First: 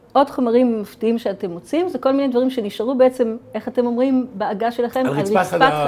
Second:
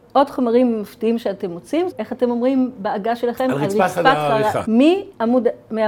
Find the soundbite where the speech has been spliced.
second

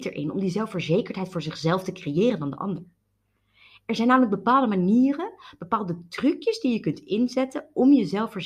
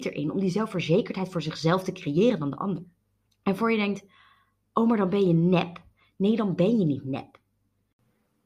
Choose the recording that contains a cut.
second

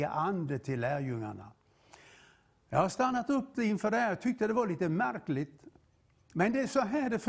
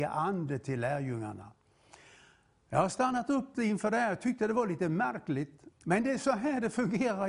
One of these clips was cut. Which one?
second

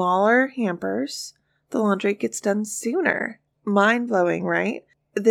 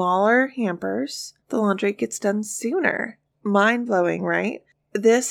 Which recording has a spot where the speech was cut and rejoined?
second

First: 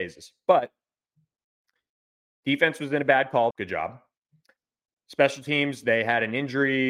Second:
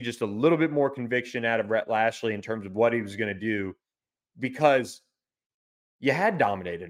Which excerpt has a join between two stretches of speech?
first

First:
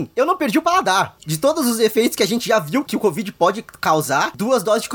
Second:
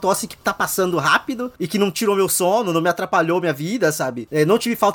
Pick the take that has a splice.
first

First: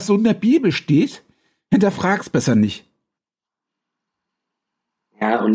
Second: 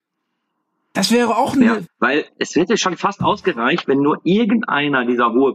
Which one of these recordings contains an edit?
second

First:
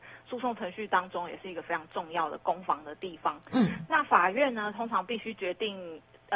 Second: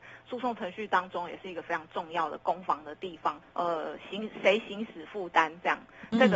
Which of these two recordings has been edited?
second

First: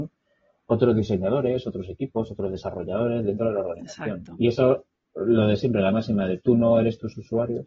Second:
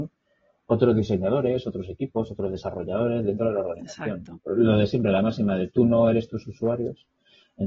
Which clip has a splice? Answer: second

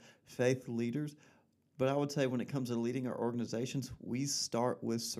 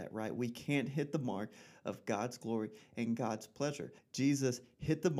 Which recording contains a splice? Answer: second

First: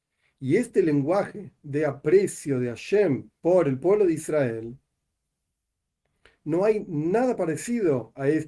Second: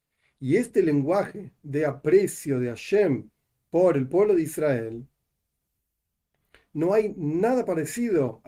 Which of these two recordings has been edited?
first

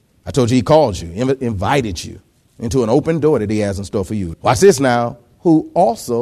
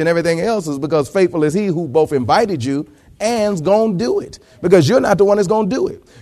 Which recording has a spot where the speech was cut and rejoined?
first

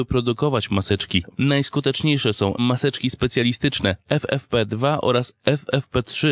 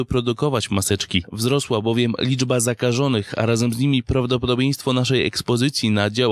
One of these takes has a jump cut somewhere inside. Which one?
first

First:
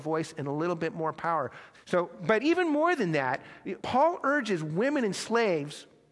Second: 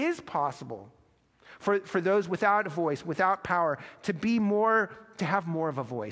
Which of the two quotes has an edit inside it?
first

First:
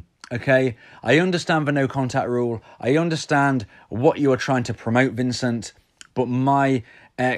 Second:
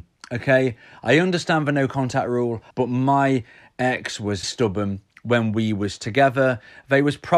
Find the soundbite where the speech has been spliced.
second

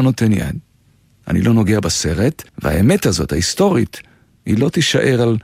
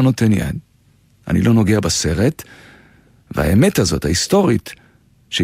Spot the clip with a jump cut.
first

